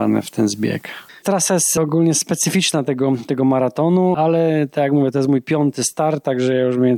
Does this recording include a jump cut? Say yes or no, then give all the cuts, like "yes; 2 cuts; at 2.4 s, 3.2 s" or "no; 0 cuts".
no; 0 cuts